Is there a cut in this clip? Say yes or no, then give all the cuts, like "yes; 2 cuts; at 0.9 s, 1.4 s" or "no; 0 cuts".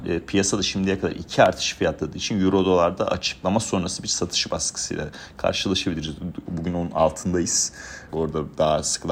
yes; 2 cuts; at 6.5 s, 8.1 s